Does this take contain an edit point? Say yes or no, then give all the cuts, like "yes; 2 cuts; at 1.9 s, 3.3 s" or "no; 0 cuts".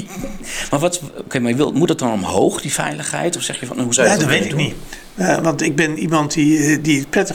no; 0 cuts